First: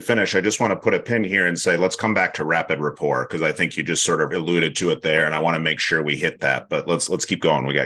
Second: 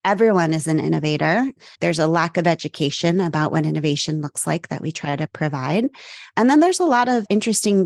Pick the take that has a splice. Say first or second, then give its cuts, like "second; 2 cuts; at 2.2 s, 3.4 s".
second; 1 cut; at 1.7 s